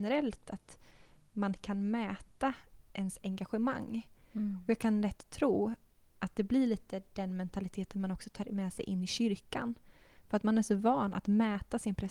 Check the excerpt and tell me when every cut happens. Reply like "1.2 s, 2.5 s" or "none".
2.9 s